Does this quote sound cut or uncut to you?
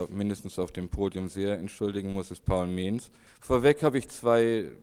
cut